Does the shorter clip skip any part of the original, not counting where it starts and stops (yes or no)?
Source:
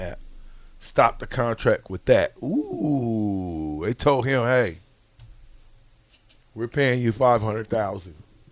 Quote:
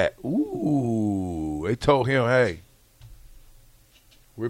no